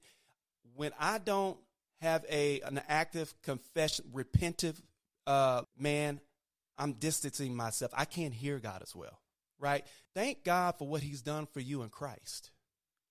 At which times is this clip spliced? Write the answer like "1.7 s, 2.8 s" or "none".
5.6 s, 10.1 s